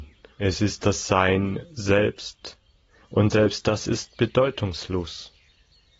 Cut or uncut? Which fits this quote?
uncut